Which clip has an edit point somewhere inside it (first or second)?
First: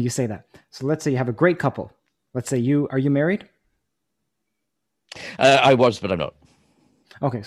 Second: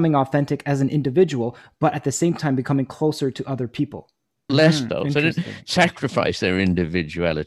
second